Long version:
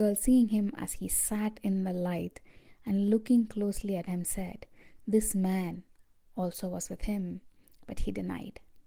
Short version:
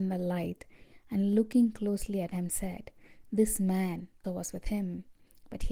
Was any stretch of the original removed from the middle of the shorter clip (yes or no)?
yes